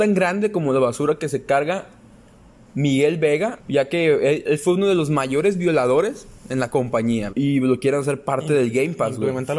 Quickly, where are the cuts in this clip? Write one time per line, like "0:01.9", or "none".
0:03.6
0:07.3